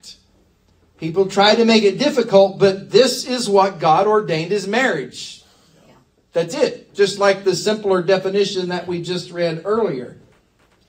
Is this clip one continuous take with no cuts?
yes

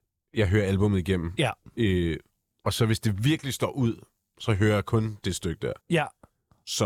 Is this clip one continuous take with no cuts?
no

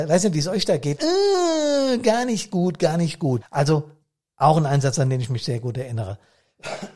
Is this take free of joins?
no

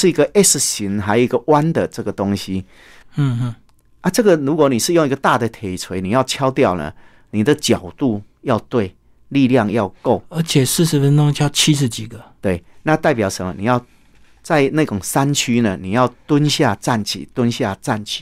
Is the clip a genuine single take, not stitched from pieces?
no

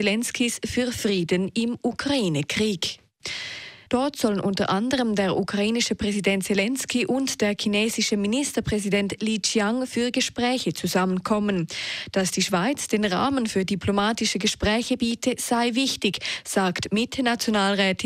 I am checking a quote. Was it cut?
yes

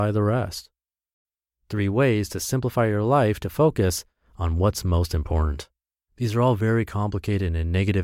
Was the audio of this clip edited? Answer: yes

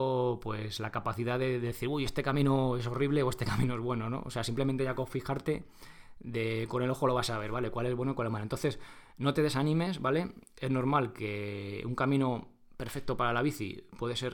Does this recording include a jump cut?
no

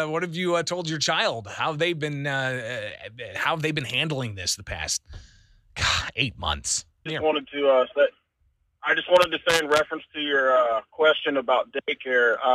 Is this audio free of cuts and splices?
no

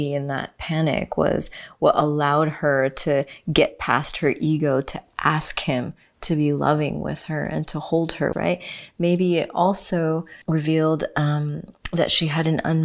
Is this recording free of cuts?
no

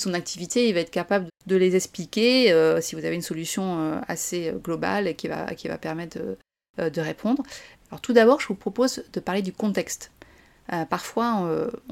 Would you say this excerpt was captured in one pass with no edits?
no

